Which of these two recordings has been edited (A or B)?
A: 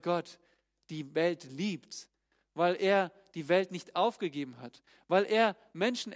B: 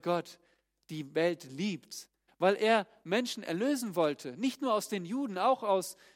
B